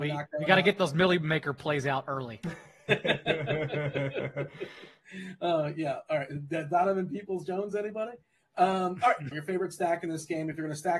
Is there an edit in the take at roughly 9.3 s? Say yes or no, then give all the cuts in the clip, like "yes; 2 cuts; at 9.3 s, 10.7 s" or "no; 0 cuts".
yes; 1 cut; at 9.3 s